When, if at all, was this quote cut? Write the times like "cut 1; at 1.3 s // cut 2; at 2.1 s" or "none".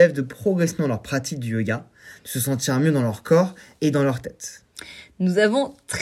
none